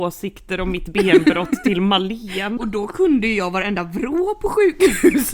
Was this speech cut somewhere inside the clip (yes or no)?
yes